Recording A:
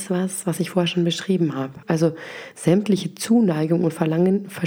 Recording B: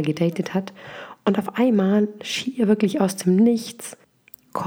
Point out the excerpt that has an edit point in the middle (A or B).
A